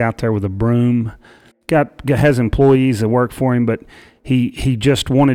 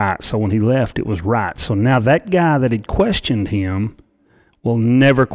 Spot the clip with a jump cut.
first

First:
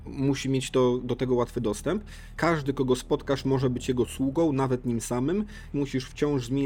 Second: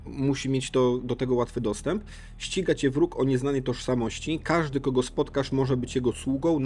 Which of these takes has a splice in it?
first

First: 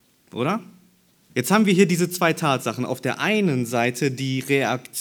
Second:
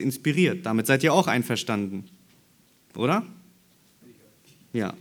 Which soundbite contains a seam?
first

